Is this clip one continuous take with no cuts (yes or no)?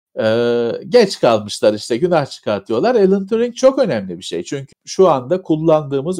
no